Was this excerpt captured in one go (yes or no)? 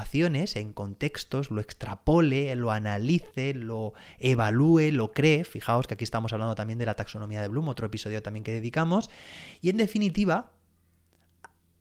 yes